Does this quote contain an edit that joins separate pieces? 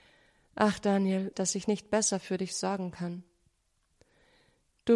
yes; 1 cut; at 1.3 s

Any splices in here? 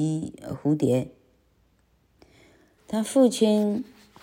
yes; 1 cut; at 2.8 s

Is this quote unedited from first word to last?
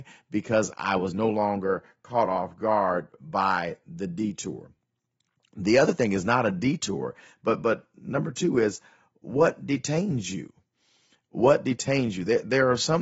yes; 0 cuts

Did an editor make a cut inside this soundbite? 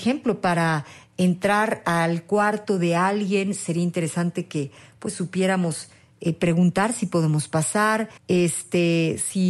yes; 1 cut; at 8.2 s

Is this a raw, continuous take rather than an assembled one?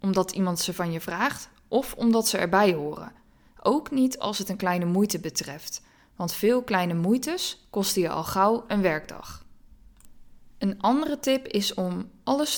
yes; 0 cuts

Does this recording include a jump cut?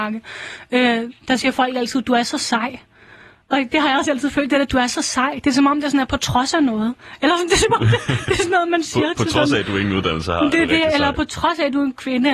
no; 0 cuts

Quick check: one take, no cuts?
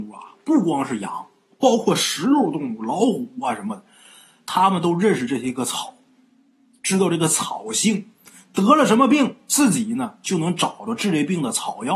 yes; 0 cuts

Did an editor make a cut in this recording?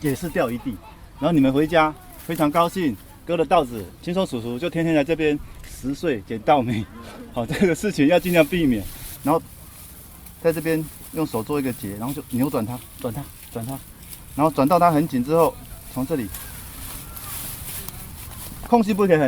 yes; 1 cut; at 9.2 s

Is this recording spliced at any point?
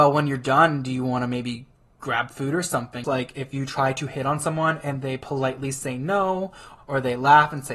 yes; 2 cuts; at 3.0 s, 6.8 s

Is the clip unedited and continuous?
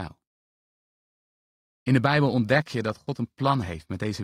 yes; 0 cuts

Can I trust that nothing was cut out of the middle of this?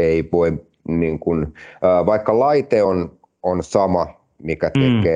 yes; 0 cuts

